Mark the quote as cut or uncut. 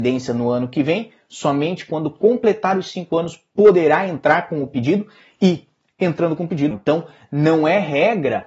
cut